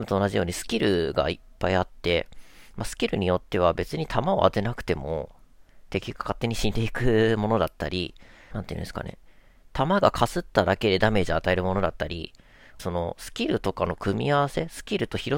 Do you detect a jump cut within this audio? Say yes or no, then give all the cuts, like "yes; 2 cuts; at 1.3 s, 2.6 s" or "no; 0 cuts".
yes; 2 cuts; at 8.5 s, 12.8 s